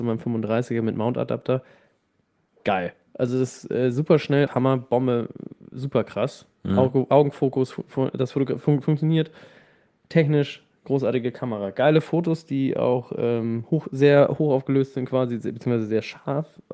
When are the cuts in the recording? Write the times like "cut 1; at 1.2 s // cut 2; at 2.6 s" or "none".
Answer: cut 1; at 4.5 s